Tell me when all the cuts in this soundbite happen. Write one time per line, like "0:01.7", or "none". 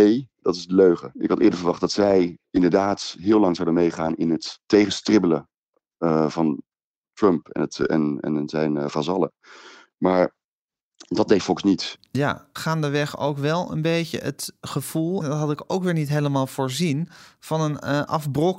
0:01.1
0:12.6
0:15.2